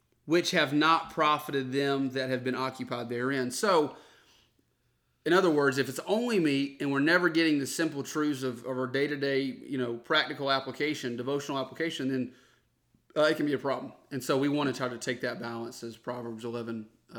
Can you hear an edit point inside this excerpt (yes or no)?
no